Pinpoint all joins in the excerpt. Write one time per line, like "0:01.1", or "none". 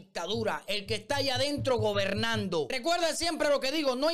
none